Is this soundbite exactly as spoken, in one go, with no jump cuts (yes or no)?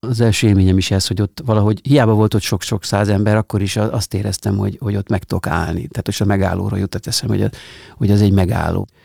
yes